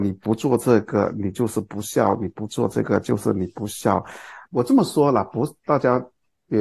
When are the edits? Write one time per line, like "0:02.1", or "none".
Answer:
0:04.4